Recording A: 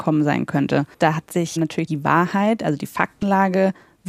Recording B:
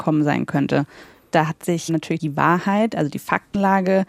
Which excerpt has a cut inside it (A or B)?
A